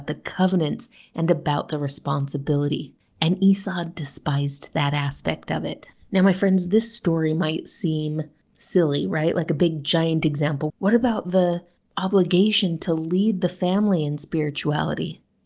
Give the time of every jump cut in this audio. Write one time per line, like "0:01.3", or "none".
0:10.7